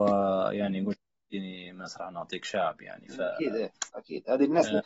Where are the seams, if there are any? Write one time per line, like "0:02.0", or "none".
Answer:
none